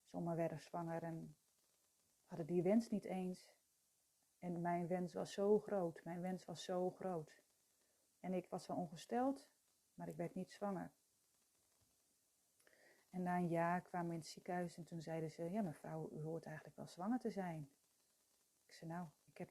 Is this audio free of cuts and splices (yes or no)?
yes